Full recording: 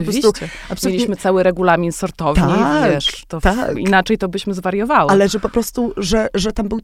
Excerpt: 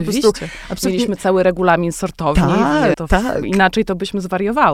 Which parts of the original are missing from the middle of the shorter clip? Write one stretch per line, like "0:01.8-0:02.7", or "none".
0:02.9-0:03.3

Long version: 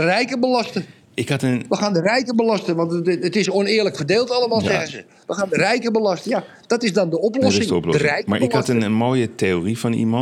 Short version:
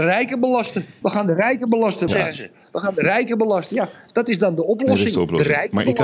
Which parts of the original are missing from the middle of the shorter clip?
0:01.0-0:01.7
0:02.7-0:04.6

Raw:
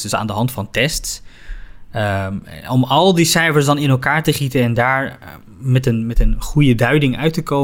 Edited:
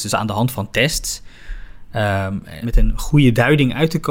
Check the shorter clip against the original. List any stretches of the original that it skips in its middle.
0:02.6-0:06.0

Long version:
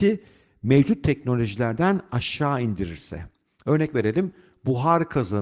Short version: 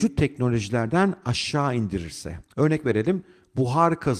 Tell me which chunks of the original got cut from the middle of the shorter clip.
0:03.4-0:03.6

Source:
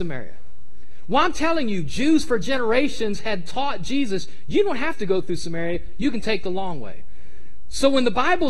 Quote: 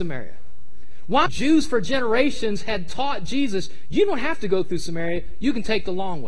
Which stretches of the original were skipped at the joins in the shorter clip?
0:01.3-0:01.8

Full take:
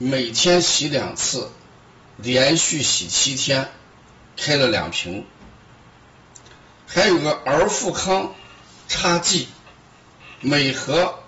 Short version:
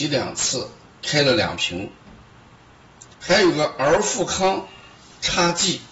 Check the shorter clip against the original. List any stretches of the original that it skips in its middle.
0:01.7-0:04.3
0:06.5-0:06.8

